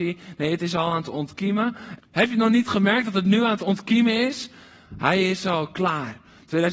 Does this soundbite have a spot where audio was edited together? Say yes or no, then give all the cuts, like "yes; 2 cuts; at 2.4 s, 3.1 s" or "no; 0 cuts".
yes; 2 cuts; at 2.0 s, 4.9 s